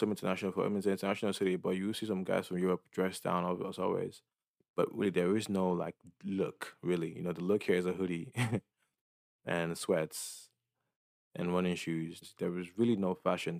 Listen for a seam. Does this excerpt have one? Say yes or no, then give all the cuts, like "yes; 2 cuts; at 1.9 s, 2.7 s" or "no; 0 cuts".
yes; 1 cut; at 12.2 s